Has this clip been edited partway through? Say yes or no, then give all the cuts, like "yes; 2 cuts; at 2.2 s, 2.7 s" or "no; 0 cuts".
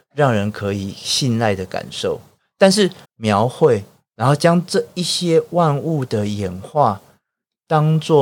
yes; 1 cut; at 3.0 s